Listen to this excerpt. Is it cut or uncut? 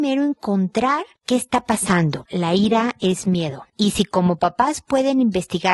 cut